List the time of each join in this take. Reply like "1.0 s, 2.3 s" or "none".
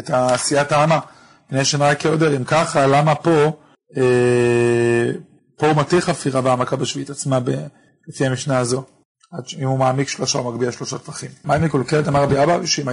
11.4 s

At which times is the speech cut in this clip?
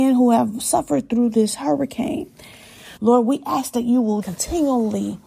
3.0 s, 4.2 s

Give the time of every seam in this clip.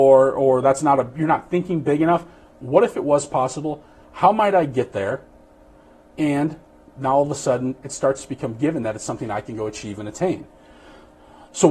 2.5 s

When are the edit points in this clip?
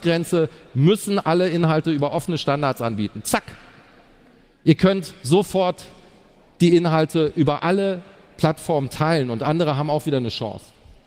none

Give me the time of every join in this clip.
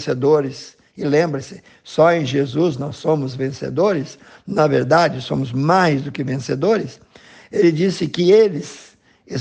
none

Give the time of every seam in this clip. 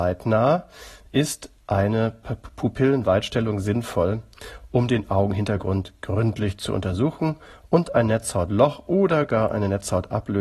none

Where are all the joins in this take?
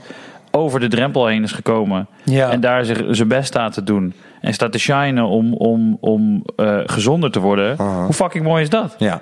6.9 s

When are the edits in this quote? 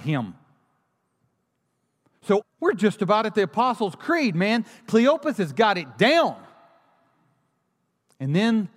2.4 s

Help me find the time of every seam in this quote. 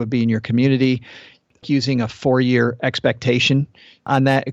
1.6 s

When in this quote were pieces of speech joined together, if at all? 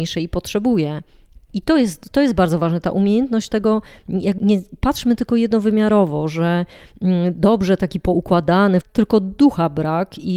4.4 s, 8.8 s

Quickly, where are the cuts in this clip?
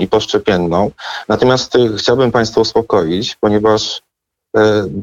none

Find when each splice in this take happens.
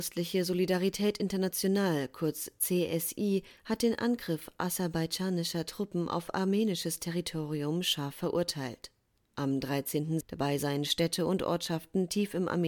10.2 s

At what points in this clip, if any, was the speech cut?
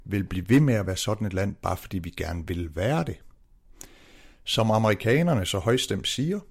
none

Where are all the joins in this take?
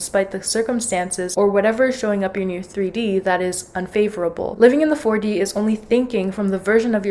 none

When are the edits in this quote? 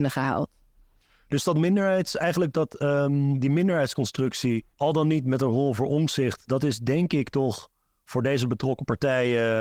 4.7 s

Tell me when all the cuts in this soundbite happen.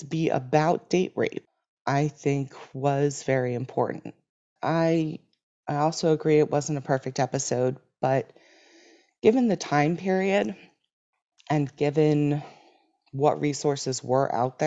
4.6 s

